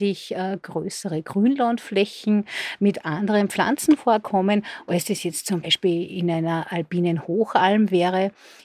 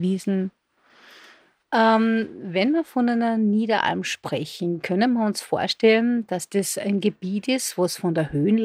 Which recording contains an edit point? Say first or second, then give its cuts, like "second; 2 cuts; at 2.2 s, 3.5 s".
first; 1 cut; at 5.6 s